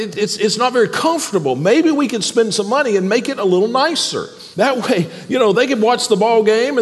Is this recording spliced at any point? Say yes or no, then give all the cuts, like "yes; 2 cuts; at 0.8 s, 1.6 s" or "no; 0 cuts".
yes; 2 cuts; at 4.5 s, 5.5 s